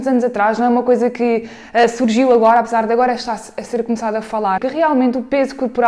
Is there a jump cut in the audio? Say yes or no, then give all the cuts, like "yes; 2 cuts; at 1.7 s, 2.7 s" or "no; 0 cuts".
yes; 1 cut; at 4.6 s